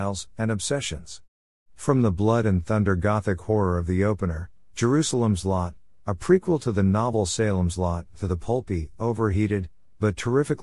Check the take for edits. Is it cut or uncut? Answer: uncut